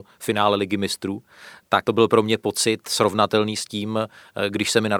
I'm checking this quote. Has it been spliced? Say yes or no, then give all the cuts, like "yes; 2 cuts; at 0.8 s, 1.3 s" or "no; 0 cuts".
yes; 1 cut; at 1.8 s